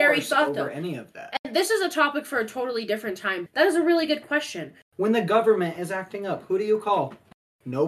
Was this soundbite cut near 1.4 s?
no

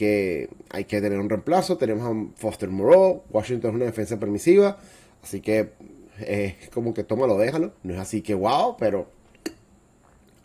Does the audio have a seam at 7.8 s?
yes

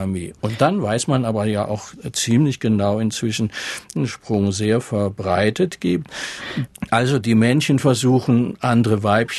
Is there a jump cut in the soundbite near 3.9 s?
yes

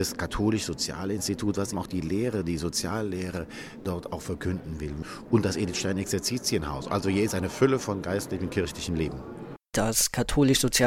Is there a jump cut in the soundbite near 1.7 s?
yes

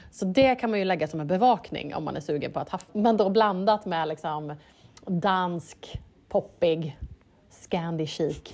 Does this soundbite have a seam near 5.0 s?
no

